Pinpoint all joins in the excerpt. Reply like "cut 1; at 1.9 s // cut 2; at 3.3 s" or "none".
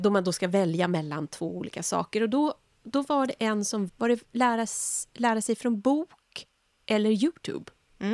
cut 1; at 3.9 s